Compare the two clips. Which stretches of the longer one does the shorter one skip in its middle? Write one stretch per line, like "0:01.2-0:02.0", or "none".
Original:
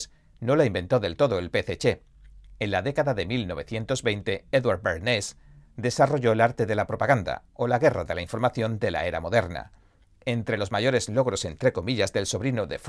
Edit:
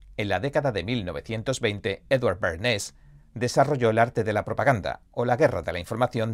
none